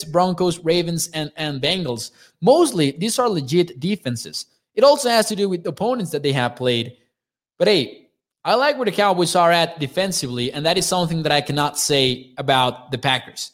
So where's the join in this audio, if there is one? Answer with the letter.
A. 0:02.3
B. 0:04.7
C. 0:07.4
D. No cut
D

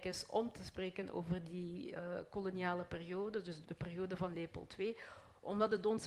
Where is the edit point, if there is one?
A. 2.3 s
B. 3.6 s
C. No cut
B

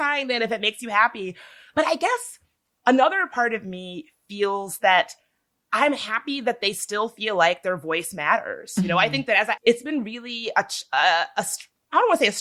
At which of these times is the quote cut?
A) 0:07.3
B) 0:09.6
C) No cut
B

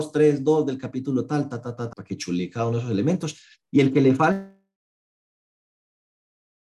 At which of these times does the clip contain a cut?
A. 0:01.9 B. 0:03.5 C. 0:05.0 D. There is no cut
A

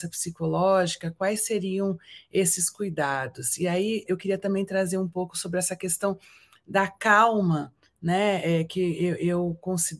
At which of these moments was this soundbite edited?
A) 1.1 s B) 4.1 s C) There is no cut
B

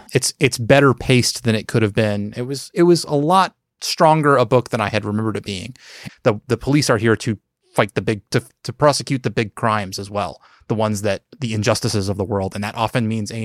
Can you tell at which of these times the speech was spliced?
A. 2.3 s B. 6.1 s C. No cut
B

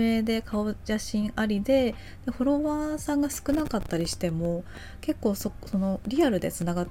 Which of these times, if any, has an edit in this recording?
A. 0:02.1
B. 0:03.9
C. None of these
C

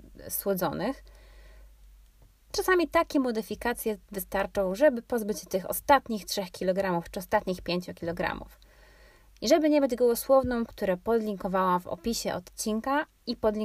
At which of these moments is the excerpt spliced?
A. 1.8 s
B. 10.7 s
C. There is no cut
B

